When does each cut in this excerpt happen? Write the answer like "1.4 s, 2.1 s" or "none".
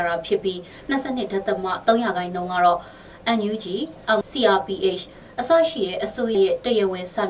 4.2 s, 6.3 s